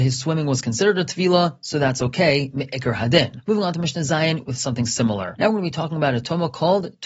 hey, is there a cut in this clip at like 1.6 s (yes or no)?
no